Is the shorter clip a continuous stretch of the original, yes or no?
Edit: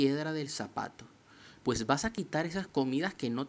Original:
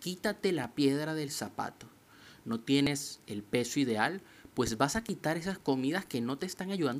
no